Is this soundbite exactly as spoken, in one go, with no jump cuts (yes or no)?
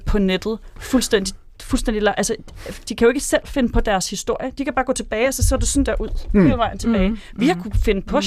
yes